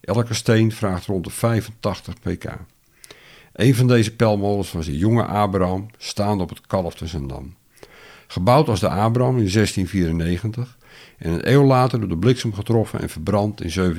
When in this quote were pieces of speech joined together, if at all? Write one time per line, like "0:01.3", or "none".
none